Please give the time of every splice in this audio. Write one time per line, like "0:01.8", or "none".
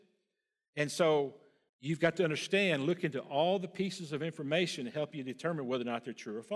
0:01.7